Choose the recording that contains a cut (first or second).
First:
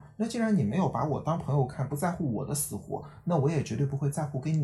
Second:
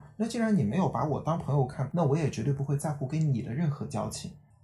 second